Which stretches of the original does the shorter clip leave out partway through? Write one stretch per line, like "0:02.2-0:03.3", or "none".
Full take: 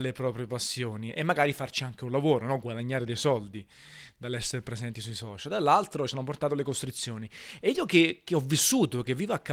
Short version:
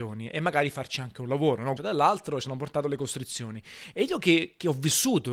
0:02.6-0:05.4